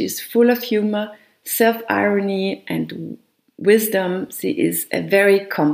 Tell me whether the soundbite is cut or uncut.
uncut